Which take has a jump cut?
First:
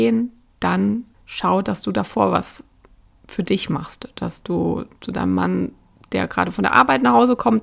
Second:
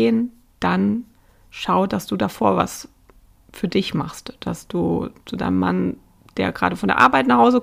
first; 1 cut; at 1.1 s

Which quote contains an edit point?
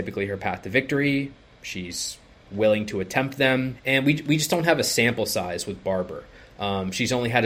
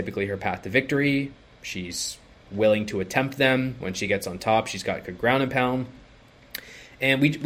first; 1 cut; at 3.7 s

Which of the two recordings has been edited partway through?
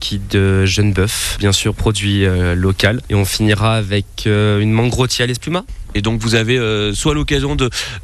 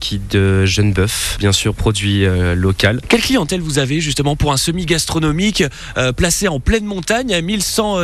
second; 1 cut; at 3.0 s

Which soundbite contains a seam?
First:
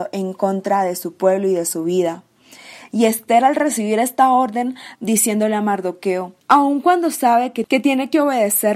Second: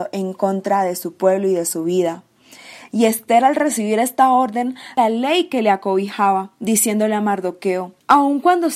first; 1 cut; at 5.0 s

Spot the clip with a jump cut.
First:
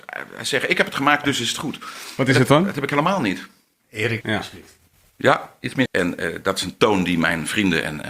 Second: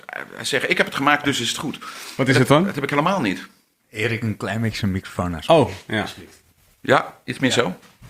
first; 2 cuts; at 4.2 s, 5.9 s

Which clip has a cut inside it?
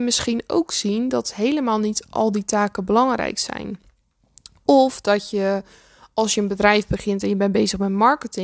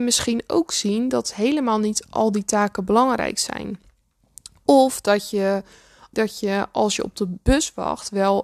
second; 1 cut; at 6.1 s

